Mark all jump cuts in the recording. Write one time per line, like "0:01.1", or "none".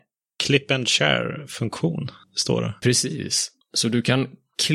none